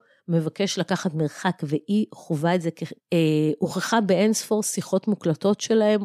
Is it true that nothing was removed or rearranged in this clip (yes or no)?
no